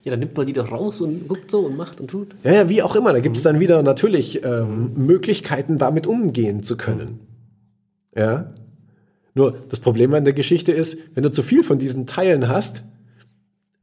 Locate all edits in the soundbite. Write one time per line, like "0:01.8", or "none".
none

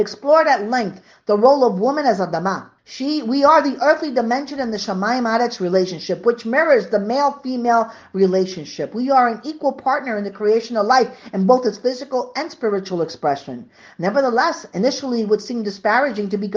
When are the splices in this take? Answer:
0:02.8

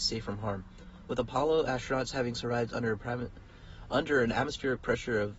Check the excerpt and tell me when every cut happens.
none

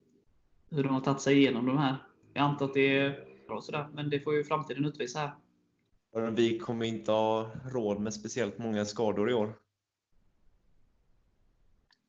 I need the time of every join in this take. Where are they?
0:02.2
0:03.5
0:06.0

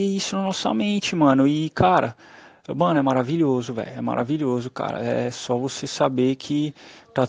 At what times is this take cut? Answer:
none

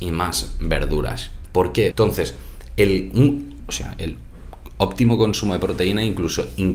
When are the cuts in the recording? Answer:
0:01.9
0:03.6

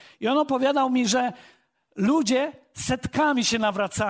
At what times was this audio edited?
none

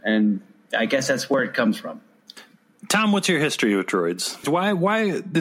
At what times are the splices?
0:04.4

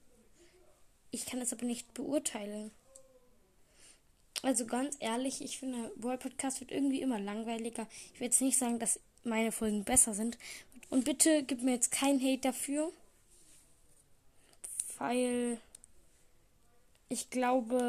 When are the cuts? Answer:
0:10.8

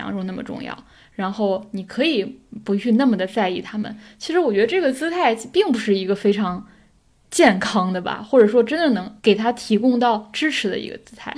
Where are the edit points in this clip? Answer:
0:09.2

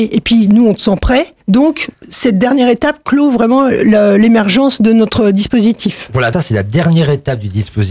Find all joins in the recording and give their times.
0:01.4
0:06.3

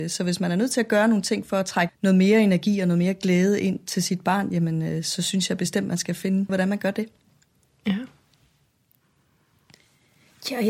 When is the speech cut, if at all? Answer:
0:01.9
0:06.5

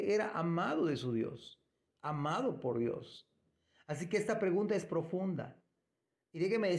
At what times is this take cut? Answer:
0:01.8

